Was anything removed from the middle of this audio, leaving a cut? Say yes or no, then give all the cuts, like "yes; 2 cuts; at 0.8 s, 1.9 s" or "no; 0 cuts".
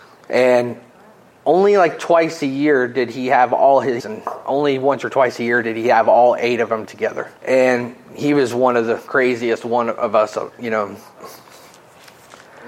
yes; 3 cuts; at 4.0 s, 7.4 s, 11.2 s